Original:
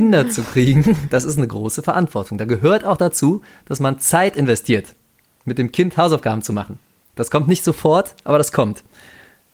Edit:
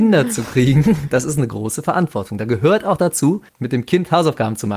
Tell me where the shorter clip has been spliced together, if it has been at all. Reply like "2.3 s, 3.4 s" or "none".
3.5 s